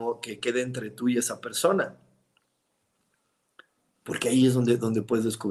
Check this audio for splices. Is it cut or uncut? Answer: uncut